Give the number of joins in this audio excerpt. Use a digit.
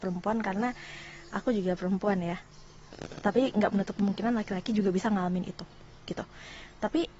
1